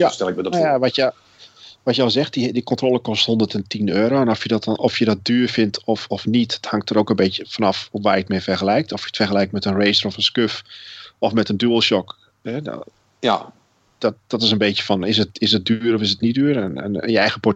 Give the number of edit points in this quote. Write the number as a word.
one